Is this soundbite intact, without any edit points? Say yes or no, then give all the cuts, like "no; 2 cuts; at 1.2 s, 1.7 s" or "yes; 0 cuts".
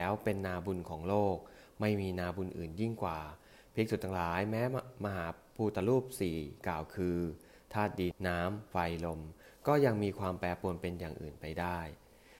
no; 1 cut; at 8.1 s